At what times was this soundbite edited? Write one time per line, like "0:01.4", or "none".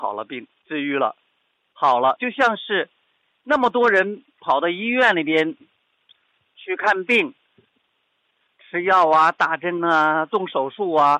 0:02.2